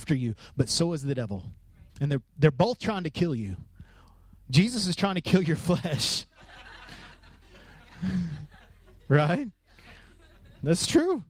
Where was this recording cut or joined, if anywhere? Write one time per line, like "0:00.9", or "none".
0:01.9